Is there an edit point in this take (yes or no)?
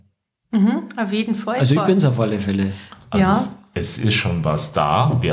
no